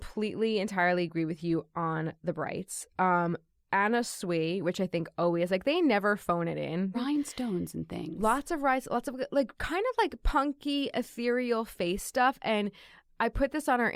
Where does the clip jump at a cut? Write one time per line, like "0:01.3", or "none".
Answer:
0:06.9